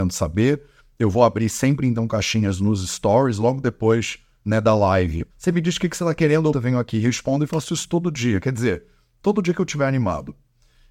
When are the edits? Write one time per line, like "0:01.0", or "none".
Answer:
0:05.3
0:06.5